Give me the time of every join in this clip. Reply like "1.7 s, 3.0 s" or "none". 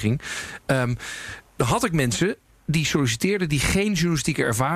1.5 s